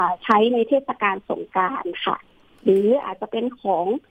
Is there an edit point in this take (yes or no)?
no